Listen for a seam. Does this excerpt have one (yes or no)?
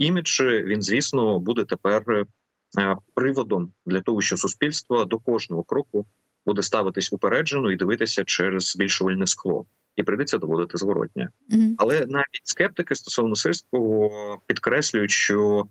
no